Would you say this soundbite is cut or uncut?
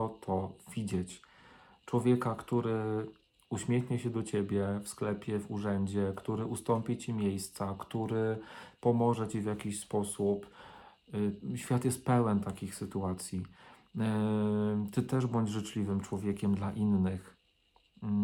uncut